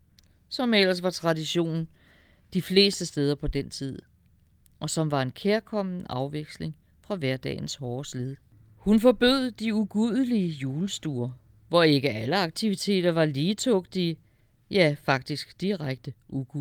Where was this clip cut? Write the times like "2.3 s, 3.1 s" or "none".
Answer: none